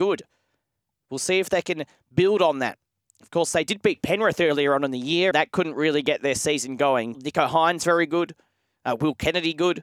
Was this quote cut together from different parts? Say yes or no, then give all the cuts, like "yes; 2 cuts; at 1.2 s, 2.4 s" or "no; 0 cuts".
yes; 2 cuts; at 5.3 s, 7.1 s